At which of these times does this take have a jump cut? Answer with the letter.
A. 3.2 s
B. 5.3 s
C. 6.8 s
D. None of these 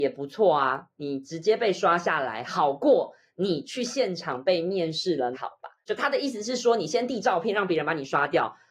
B